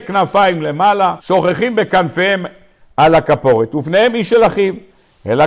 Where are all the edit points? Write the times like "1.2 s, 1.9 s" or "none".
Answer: 1.2 s